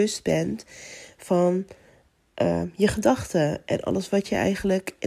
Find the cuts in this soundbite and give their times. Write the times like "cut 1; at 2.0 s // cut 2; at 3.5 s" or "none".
none

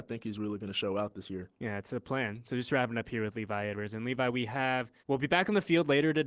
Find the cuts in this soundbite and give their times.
cut 1; at 5.0 s

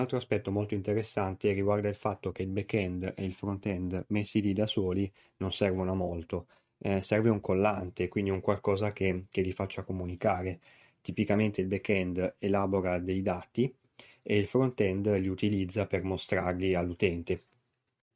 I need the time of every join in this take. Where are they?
none

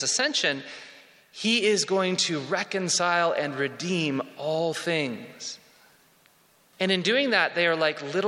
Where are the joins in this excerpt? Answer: cut 1; at 6.7 s

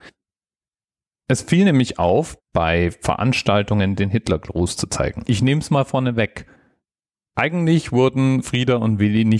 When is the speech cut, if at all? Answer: cut 1; at 2.4 s // cut 2; at 5.2 s

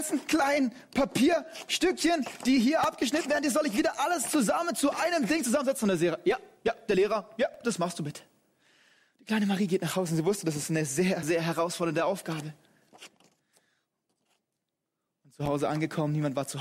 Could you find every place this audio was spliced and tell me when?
cut 1; at 11.2 s

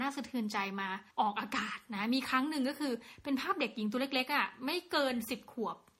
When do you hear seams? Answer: cut 1; at 1.1 s

